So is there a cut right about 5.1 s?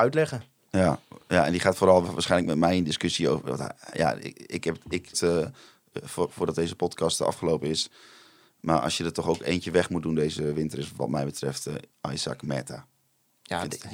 yes; 1 cut; at 5.1 s

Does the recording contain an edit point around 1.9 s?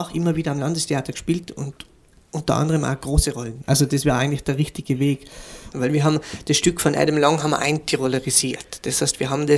no; 1 cut; at 5.7 s

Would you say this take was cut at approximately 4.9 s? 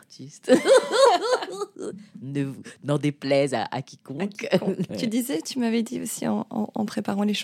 yes; 1 cut; at 4.9 s

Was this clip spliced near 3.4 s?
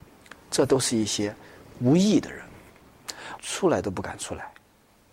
yes; 1 cut; at 3.4 s

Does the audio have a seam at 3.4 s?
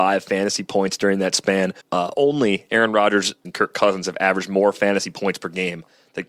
yes; 2 cuts; at 1.8 s, 3.4 s

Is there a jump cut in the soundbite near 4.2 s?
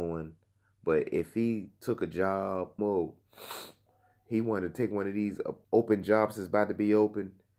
no; 2 cuts; at 2.8 s, 5.6 s

